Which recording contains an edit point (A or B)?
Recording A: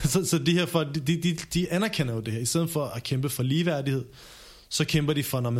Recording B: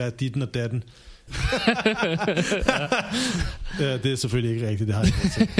B